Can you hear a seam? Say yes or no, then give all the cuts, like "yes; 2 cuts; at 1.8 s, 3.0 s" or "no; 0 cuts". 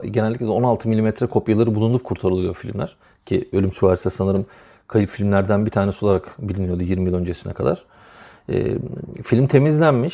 no; 0 cuts